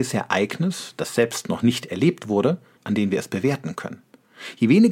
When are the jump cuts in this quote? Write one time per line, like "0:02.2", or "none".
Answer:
0:02.8